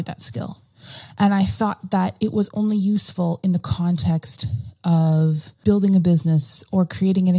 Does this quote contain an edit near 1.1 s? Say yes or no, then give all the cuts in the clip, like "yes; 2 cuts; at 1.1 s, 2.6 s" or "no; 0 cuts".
no; 1 cut; at 5.6 s